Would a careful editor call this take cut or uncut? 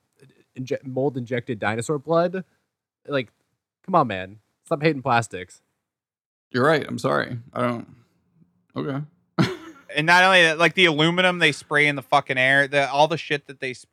uncut